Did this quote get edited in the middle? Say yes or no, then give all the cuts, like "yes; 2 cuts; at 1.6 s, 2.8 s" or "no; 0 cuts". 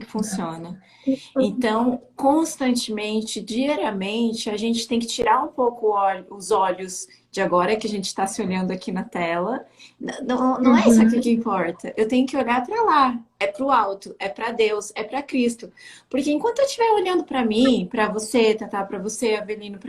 no; 0 cuts